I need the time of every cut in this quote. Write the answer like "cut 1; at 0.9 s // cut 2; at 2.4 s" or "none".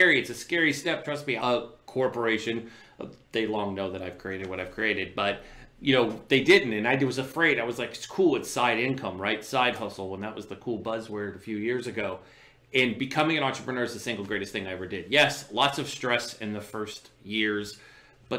cut 1; at 1.4 s